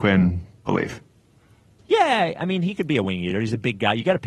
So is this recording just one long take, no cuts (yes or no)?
yes